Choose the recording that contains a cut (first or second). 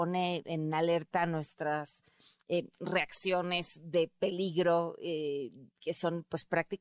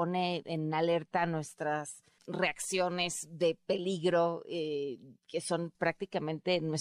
second